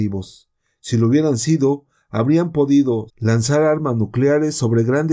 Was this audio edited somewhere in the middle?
yes; 1 cut; at 3.1 s

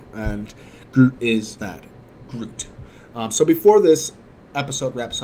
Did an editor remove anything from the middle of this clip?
yes; 1 cut; at 1.6 s

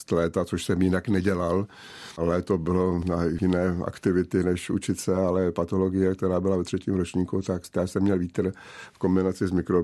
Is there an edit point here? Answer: no; 0 cuts

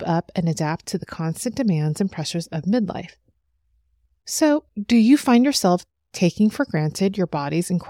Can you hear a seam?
yes; 1 cut; at 4.2 s

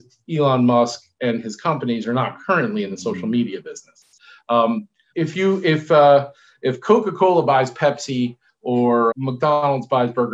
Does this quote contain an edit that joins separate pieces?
yes; 2 cuts; at 5.1 s, 9.1 s

